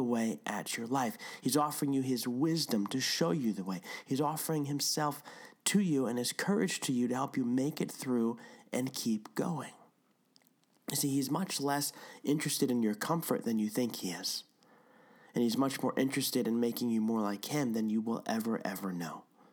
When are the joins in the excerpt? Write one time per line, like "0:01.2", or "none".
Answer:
0:01.4